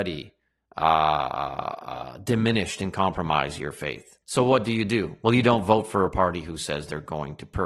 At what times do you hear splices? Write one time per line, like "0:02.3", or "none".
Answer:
0:04.2